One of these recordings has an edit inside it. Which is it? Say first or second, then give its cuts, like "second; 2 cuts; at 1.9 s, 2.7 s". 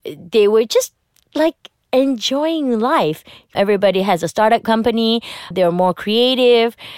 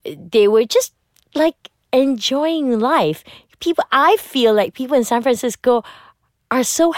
first; 2 cuts; at 3.5 s, 5.5 s